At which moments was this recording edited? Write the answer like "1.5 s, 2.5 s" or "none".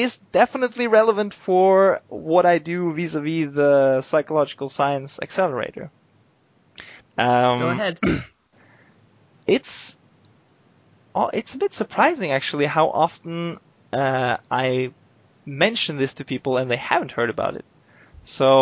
7.0 s